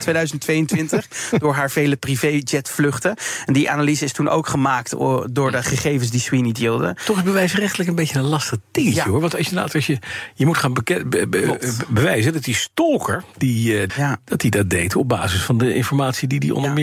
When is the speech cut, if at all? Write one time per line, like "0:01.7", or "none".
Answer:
0:13.9